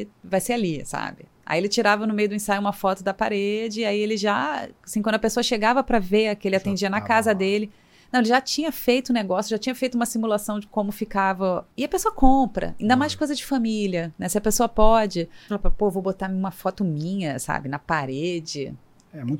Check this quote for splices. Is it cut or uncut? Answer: cut